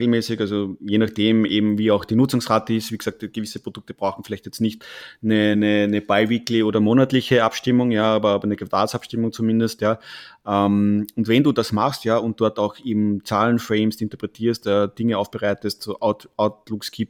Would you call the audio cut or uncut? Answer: uncut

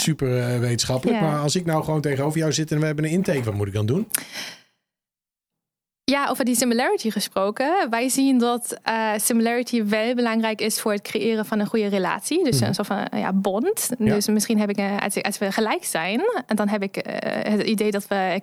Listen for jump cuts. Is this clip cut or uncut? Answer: uncut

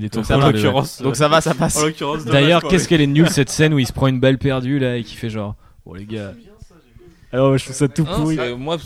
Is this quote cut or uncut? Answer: uncut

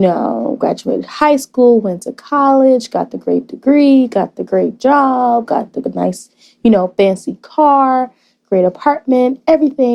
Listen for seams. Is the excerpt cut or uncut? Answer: uncut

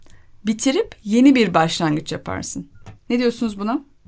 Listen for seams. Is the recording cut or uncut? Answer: cut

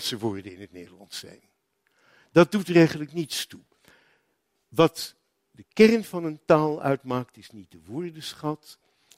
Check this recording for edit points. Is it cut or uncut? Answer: uncut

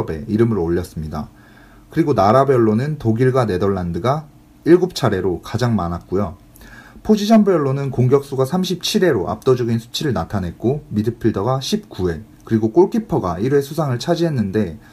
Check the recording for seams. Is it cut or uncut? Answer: cut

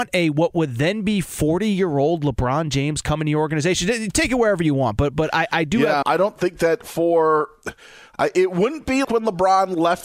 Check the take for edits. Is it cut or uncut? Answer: cut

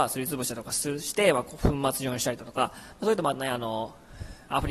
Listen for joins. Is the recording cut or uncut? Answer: uncut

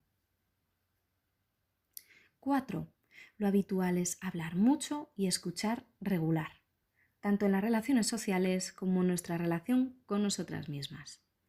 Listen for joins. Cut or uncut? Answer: uncut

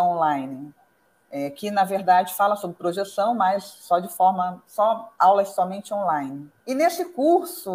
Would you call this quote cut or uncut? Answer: cut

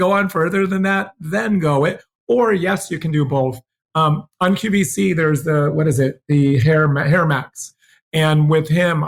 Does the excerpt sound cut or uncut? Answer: uncut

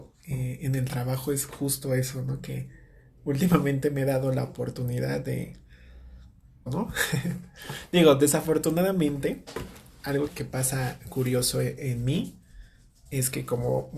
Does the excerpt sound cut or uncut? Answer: cut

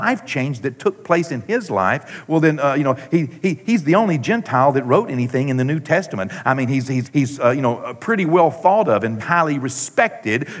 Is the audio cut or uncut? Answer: cut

